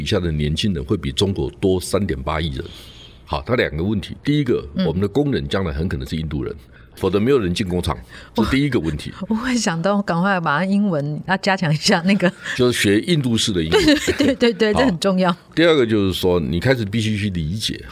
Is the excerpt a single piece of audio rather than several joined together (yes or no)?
yes